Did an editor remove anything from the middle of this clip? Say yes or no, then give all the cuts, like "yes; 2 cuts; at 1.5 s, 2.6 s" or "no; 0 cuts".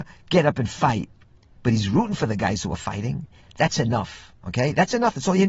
yes; 1 cut; at 3.4 s